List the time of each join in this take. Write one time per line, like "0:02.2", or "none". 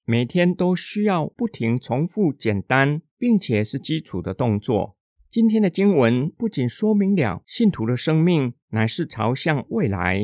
0:05.2